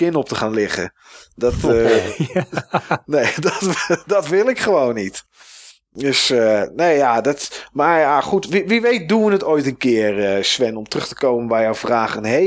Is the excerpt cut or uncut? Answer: uncut